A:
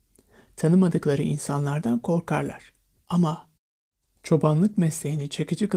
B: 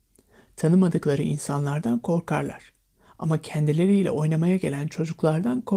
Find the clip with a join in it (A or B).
A